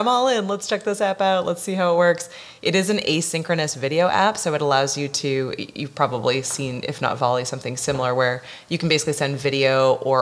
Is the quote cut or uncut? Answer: uncut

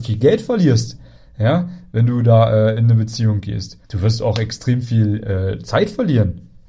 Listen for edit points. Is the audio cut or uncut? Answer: cut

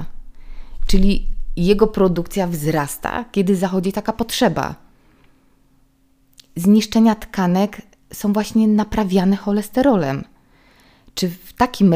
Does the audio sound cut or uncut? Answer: uncut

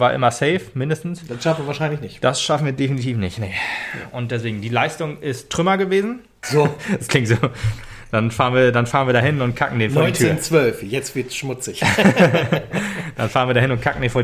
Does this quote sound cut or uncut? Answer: cut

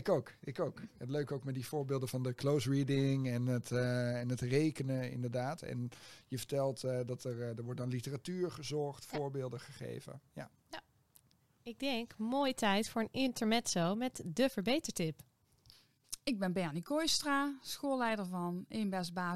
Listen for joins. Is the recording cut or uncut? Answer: uncut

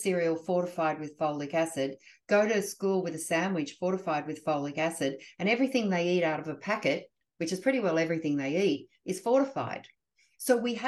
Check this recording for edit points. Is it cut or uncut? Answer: uncut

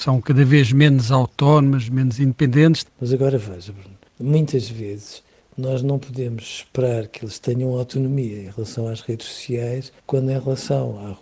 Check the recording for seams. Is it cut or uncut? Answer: cut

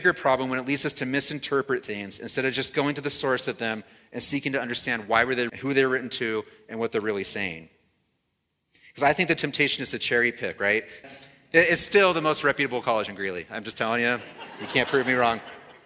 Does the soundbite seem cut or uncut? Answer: cut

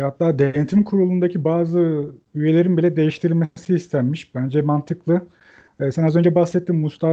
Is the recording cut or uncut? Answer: uncut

